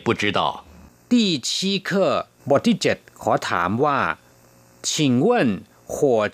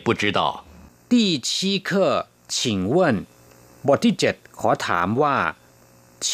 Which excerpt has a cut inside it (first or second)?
first